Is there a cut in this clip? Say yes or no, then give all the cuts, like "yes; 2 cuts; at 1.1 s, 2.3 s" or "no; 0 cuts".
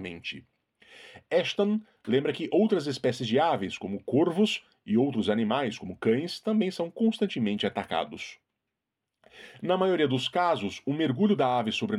no; 0 cuts